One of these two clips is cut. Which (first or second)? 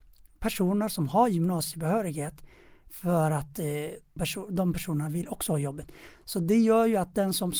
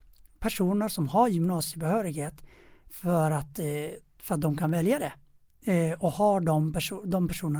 first